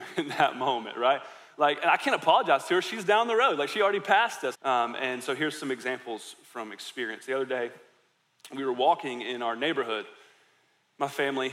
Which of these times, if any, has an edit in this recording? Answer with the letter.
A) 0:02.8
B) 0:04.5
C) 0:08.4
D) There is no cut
B